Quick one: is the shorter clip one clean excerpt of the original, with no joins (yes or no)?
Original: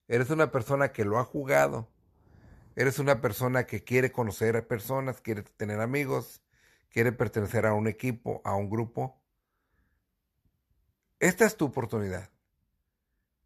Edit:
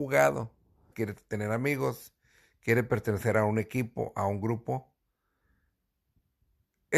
no